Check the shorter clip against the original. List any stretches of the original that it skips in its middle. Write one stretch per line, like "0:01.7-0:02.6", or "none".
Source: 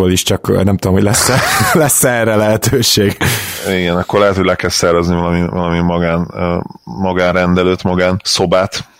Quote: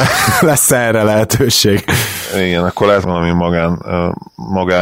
0:04.3-0:05.5